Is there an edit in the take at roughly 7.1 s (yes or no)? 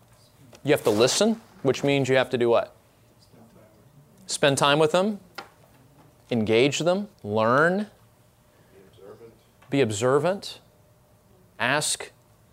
yes